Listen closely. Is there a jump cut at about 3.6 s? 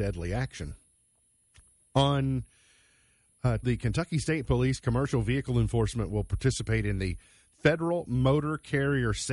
yes; 1 cut; at 3.6 s

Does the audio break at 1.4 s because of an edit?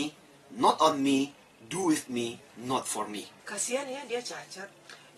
no; 1 cut; at 3.4 s

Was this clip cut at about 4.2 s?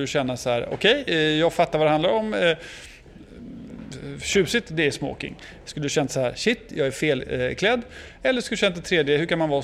no; 0 cuts

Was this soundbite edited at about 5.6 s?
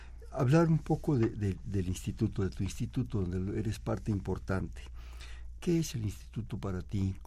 yes; 1 cut; at 5.6 s

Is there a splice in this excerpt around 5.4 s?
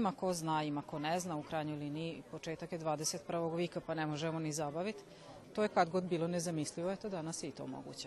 yes; 1 cut; at 5.4 s

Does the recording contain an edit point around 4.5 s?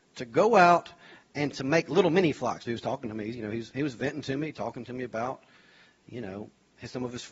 no; 1 cut; at 2.6 s

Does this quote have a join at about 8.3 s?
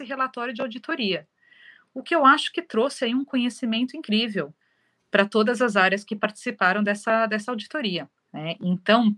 yes; 1 cut; at 8.3 s

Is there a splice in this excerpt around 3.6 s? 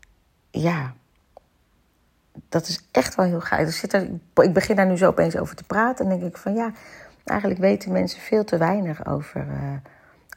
no; 0 cuts

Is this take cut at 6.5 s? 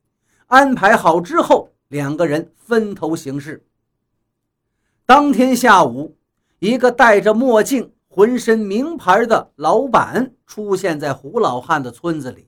no; 0 cuts

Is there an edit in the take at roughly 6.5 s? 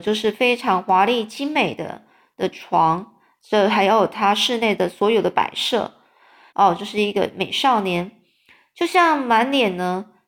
yes; 1 cut; at 6.5 s

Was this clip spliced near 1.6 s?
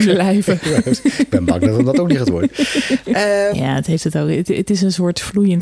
no; 1 cut; at 3.5 s

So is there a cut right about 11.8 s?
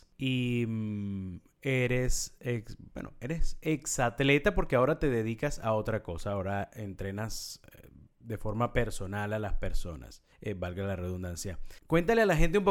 yes; 1 cut; at 11.8 s

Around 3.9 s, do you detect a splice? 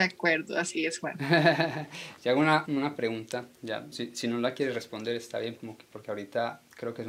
yes; 3 cuts; at 2.6 s, 3.9 s, 5.6 s

